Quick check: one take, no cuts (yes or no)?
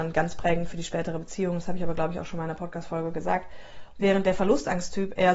no